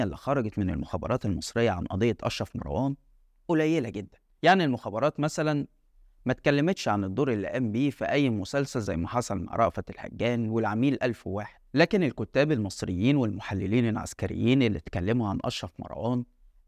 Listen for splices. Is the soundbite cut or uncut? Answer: uncut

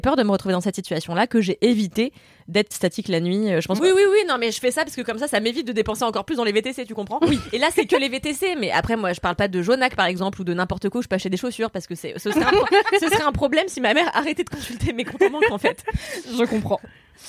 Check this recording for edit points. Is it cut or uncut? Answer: cut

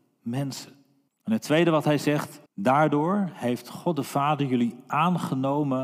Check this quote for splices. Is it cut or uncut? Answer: cut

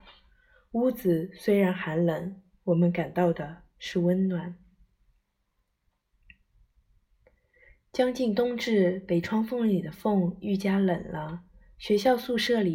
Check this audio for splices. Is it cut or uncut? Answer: uncut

